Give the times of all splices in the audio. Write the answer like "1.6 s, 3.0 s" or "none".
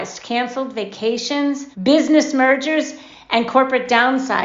1.7 s